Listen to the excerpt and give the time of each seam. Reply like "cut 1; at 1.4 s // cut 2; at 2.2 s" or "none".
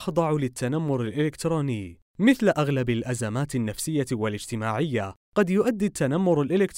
cut 1; at 2.1 s // cut 2; at 5.2 s